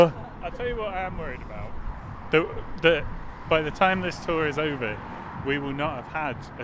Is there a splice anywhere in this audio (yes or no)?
no